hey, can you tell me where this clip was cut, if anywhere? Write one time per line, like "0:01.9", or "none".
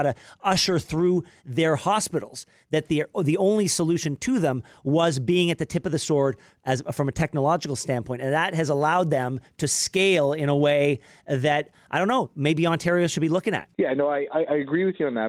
0:13.7